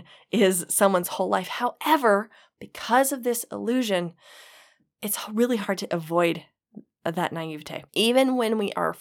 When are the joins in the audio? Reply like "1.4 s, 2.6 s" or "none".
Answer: 7.9 s